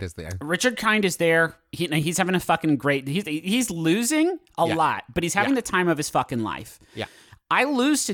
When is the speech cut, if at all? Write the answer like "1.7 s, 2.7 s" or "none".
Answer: none